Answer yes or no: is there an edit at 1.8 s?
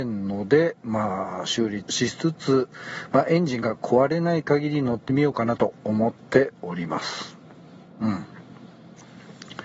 yes